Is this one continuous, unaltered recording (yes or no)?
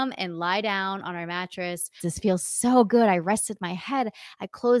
no